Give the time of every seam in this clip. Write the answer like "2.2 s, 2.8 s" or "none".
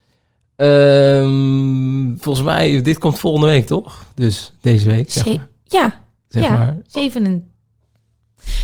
none